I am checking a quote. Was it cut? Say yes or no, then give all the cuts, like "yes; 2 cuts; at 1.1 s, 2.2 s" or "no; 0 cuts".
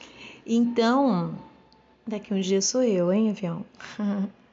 no; 0 cuts